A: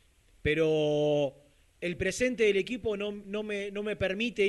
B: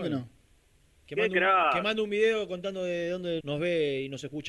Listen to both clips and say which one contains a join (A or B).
B